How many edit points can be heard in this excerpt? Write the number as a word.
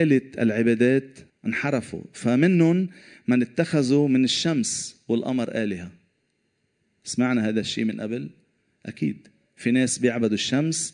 one